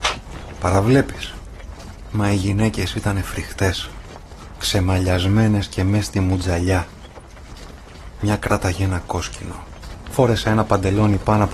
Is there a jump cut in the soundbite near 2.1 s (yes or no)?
no